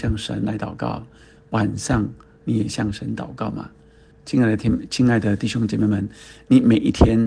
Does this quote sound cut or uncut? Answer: cut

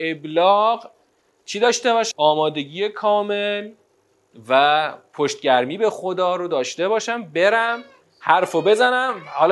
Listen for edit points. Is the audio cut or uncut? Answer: cut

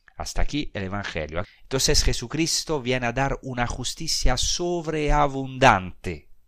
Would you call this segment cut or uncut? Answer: cut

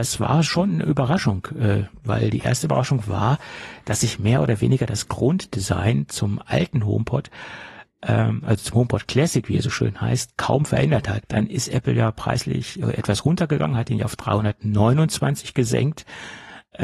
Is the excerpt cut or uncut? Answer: cut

